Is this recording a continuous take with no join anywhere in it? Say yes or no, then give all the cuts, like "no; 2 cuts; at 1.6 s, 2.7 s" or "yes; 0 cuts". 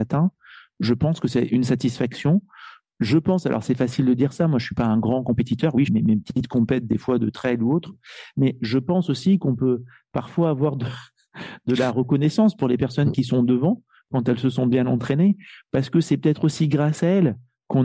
no; 1 cut; at 5.9 s